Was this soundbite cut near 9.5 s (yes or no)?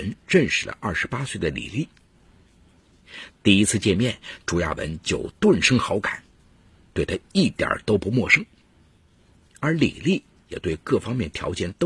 no